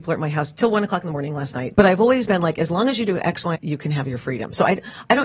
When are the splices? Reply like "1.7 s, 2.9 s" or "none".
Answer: 1.7 s, 3.5 s